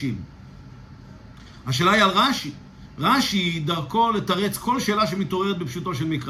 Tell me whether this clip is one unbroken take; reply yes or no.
yes